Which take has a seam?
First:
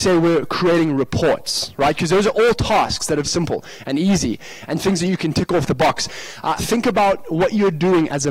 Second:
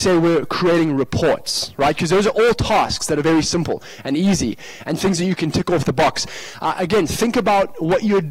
first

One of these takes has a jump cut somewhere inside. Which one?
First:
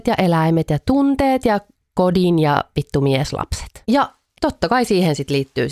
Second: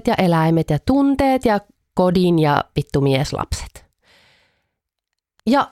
first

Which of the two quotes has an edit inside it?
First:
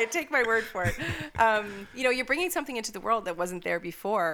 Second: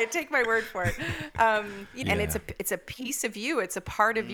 second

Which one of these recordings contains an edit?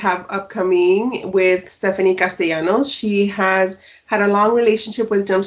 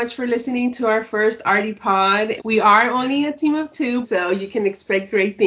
second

